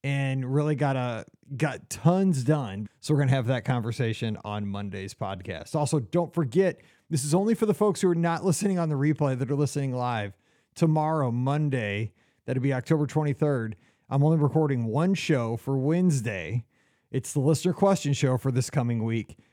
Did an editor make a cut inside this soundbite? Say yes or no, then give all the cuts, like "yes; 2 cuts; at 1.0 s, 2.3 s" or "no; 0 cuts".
yes; 1 cut; at 2.9 s